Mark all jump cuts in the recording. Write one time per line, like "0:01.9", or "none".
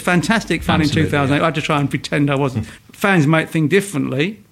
0:02.8